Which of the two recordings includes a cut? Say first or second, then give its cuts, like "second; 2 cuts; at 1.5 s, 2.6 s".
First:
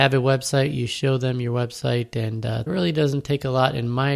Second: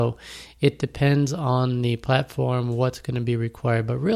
first; 1 cut; at 2.7 s